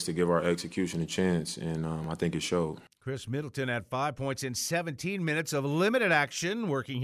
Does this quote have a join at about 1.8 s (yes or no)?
no